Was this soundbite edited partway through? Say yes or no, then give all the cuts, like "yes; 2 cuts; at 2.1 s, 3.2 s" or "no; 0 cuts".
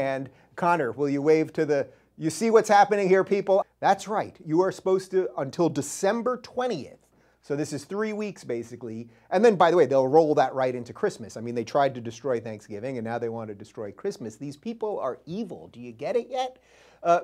yes; 1 cut; at 3.6 s